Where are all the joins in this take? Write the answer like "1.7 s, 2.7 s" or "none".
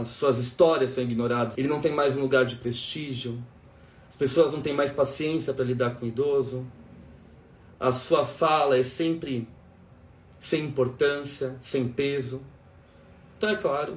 1.6 s